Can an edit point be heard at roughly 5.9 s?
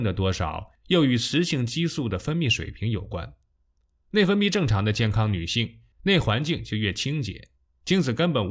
yes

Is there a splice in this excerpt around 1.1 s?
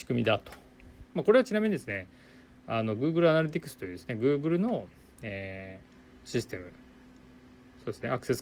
yes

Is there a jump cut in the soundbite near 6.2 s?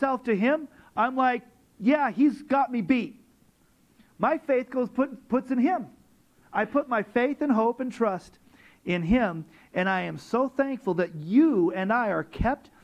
no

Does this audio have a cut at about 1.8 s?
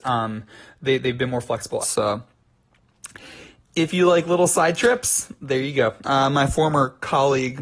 yes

